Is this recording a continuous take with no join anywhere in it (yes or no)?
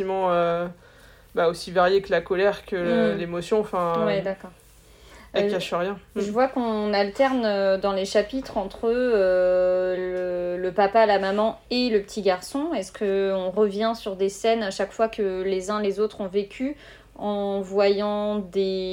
yes